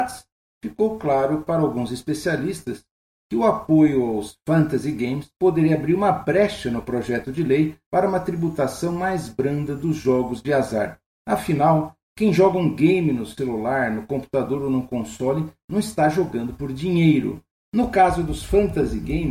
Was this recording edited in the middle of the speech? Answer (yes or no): no